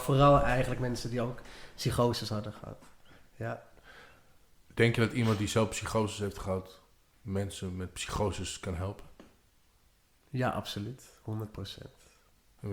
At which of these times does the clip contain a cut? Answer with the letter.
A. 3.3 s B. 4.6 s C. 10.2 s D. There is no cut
D